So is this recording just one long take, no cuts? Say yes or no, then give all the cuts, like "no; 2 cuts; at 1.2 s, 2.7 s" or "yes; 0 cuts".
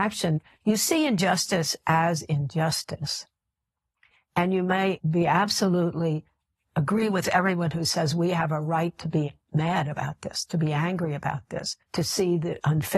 no; 1 cut; at 11.8 s